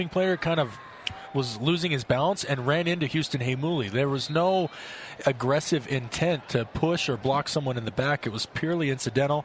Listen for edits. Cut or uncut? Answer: uncut